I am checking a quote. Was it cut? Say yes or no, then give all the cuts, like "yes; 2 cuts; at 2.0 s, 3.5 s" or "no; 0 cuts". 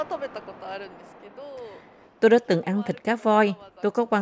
no; 0 cuts